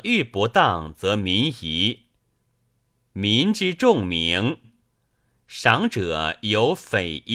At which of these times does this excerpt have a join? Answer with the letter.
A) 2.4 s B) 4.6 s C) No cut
B